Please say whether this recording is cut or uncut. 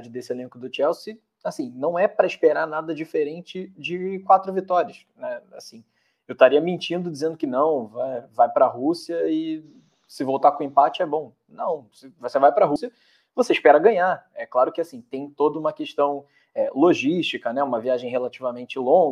uncut